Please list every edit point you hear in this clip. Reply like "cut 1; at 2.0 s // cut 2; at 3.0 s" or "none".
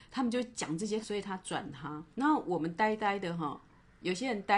cut 1; at 1.0 s // cut 2; at 2.1 s